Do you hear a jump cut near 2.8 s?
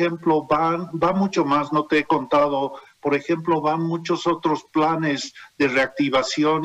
no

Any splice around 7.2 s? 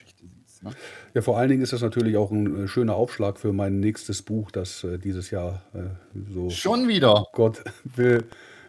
no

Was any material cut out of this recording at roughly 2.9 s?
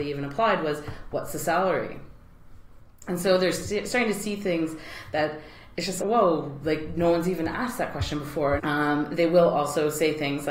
no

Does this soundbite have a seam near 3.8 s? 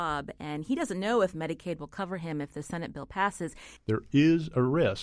yes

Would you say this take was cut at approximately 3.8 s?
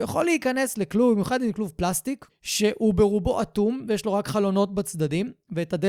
no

